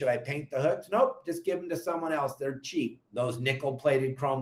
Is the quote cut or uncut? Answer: cut